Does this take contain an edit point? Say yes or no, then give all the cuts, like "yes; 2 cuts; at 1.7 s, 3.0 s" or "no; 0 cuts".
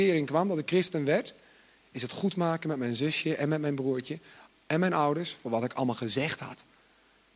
no; 0 cuts